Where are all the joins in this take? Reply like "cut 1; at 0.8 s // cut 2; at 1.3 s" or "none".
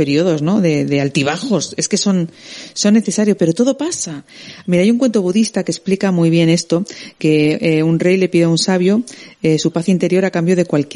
none